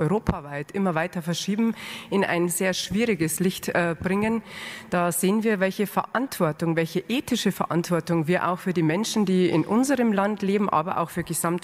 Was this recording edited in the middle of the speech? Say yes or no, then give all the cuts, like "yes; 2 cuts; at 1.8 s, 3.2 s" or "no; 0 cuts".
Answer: no; 0 cuts